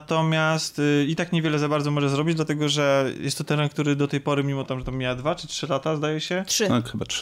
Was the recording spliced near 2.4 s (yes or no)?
no